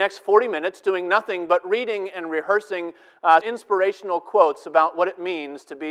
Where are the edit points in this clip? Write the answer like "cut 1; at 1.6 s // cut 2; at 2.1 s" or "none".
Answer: cut 1; at 3.4 s